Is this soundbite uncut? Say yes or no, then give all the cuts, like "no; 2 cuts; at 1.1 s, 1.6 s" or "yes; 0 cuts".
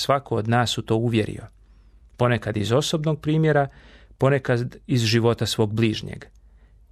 yes; 0 cuts